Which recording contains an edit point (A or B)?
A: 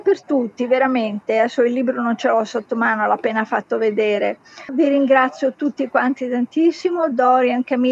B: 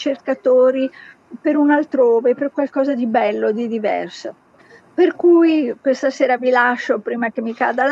A